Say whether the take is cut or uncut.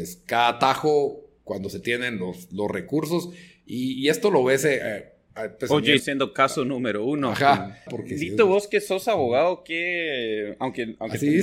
cut